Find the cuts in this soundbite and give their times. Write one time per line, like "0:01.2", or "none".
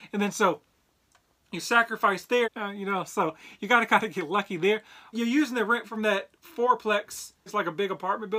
0:02.4
0:05.1
0:07.5